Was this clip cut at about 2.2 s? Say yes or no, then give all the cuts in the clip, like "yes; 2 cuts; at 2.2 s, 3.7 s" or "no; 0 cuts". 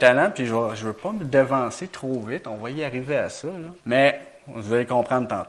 no; 1 cut; at 3.8 s